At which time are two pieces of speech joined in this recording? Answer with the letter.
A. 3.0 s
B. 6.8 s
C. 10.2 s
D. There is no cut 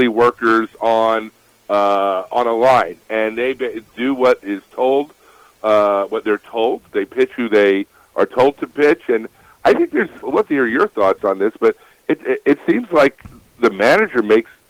C